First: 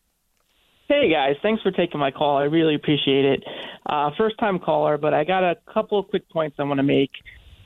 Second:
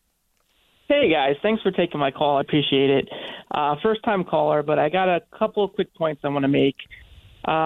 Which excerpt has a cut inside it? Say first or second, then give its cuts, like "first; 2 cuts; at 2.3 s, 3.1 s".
second; 1 cut; at 2.4 s